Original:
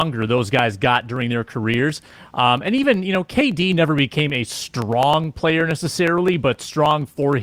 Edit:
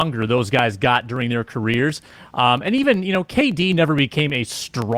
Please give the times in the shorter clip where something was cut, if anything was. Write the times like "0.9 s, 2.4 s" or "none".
none